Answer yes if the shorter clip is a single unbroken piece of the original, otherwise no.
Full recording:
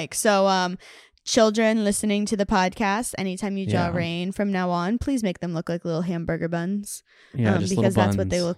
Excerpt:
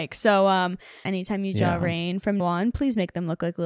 no